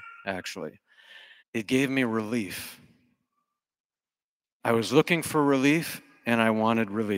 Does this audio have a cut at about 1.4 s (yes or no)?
yes